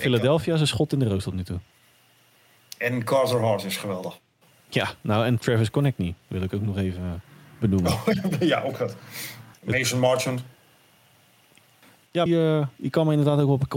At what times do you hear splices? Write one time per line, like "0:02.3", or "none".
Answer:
0:09.5
0:12.3